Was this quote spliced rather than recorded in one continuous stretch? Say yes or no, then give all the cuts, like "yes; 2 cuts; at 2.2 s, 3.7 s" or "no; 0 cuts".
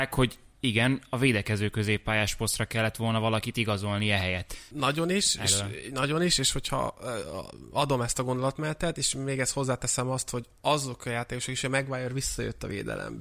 yes; 1 cut; at 4.7 s